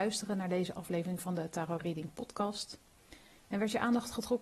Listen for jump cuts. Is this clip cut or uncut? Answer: uncut